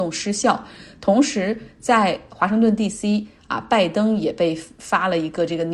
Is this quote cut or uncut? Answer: uncut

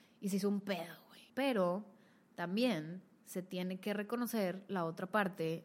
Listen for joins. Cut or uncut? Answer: cut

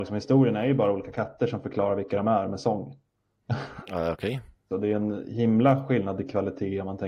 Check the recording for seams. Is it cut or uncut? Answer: cut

